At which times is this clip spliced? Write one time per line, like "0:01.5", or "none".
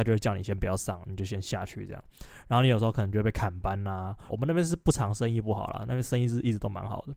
0:04.3